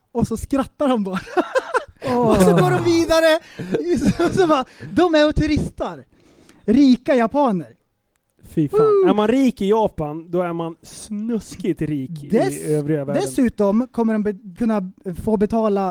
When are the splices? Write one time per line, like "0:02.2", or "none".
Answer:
none